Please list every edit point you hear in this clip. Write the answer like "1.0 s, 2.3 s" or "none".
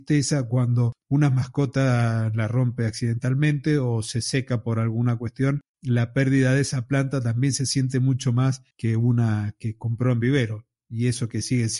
5.7 s, 8.7 s